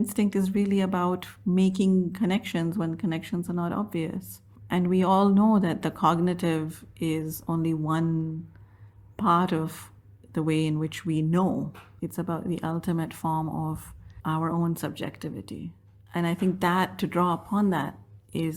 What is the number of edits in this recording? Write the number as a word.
one